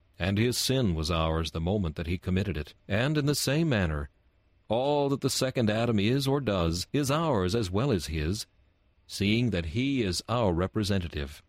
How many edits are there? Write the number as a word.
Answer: two